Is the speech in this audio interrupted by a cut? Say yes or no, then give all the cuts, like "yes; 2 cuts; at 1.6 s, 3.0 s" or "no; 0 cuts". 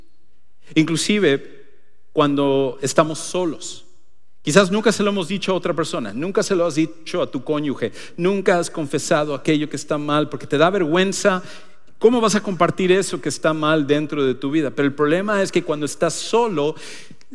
no; 0 cuts